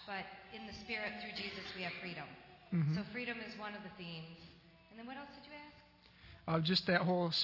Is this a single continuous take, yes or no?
yes